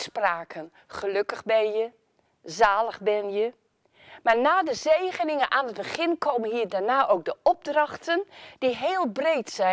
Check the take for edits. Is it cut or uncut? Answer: uncut